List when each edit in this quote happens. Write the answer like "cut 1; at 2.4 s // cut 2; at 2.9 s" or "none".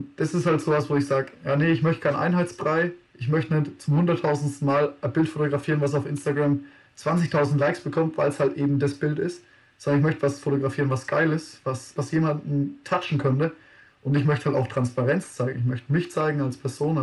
cut 1; at 12.0 s